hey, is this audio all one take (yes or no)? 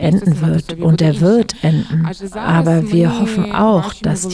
yes